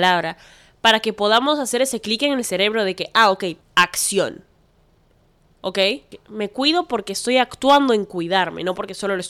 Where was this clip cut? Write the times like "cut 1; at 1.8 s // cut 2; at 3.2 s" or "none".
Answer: cut 1; at 3.6 s